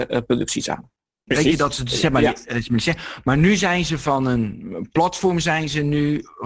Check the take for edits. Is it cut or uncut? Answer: cut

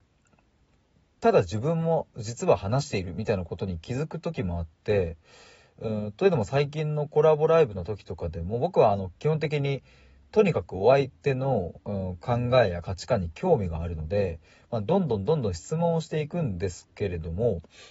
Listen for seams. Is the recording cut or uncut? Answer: uncut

